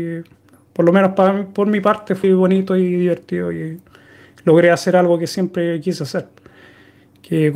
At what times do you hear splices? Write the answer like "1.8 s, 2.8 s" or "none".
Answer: 2.2 s